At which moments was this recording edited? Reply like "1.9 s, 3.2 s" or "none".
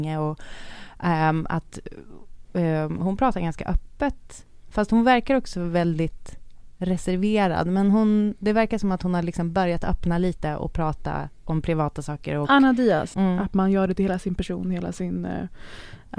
13.1 s